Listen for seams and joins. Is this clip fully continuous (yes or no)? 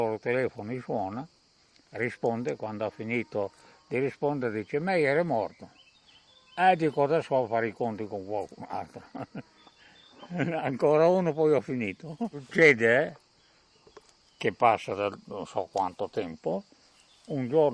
yes